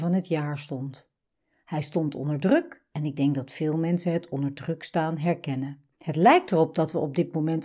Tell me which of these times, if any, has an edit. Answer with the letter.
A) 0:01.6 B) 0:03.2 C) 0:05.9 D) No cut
C